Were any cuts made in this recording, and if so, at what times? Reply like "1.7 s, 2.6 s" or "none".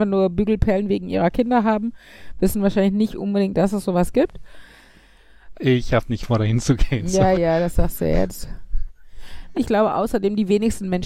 5.5 s, 7.3 s, 9.5 s